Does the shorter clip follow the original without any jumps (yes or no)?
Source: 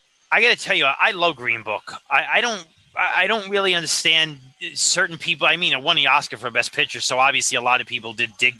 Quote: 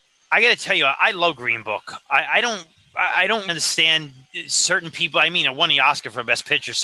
no